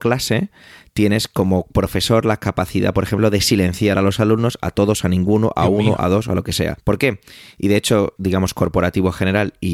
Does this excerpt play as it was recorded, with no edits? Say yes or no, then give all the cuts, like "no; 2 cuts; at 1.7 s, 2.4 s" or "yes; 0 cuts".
no; 2 cuts; at 6.8 s, 8.2 s